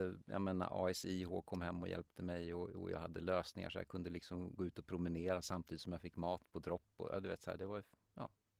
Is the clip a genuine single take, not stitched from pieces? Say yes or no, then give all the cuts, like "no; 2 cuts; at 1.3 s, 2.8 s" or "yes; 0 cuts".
yes; 0 cuts